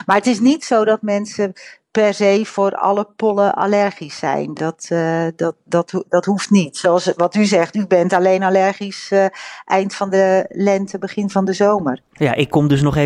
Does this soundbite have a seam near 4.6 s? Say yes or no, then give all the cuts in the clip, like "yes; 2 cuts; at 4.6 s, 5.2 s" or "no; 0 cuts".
no; 0 cuts